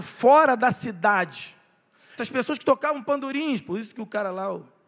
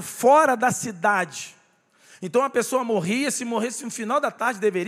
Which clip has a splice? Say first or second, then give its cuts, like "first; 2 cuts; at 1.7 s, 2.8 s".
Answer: first; 1 cut; at 2.2 s